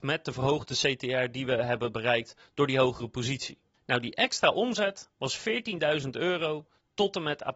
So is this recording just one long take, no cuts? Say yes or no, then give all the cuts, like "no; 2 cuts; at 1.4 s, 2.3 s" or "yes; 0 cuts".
yes; 0 cuts